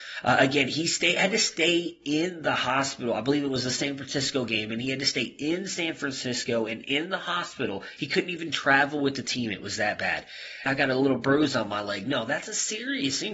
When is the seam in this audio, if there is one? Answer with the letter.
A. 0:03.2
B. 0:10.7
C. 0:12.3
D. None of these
B